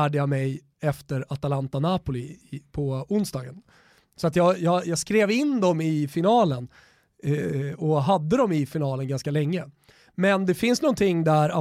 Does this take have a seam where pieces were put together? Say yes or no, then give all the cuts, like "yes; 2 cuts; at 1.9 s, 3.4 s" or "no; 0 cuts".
no; 0 cuts